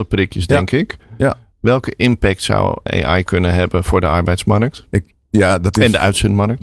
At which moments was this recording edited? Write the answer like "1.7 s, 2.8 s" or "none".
2.9 s

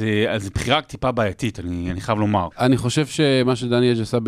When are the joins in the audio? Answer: 2.5 s

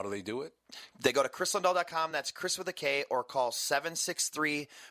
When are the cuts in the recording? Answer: none

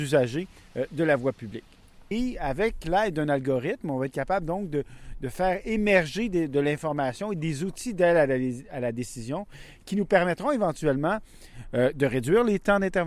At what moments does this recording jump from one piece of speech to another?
2.1 s

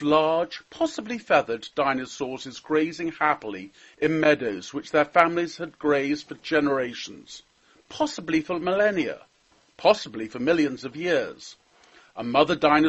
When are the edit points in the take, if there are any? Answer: none

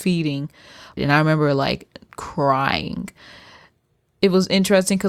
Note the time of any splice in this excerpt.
1.0 s

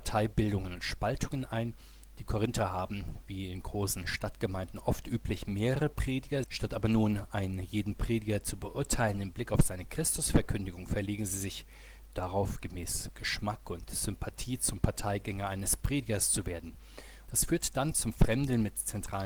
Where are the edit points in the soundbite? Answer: 6.4 s, 17.3 s

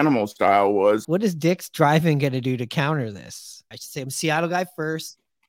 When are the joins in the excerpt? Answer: 1.0 s, 3.7 s

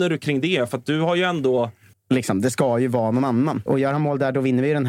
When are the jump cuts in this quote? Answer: 1.9 s, 3.7 s

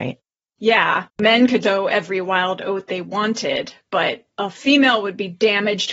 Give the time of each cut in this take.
1.6 s

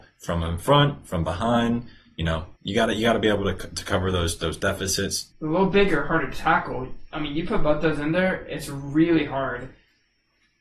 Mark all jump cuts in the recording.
2.6 s, 5.3 s

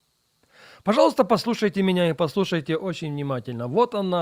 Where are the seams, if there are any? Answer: none

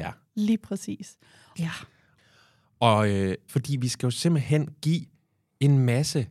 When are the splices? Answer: 1.5 s, 3.5 s

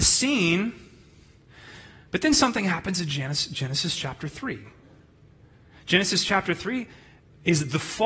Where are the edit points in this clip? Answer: none

